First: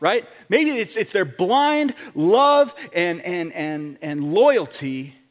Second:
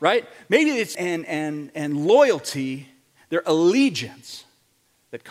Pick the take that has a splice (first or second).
second